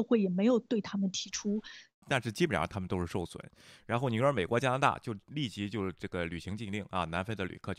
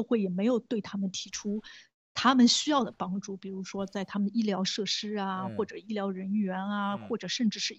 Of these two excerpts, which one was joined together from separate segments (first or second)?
first